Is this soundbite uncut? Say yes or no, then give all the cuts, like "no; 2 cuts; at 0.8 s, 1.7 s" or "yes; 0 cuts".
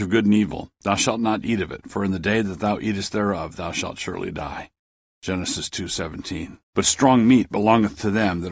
no; 1 cut; at 6.6 s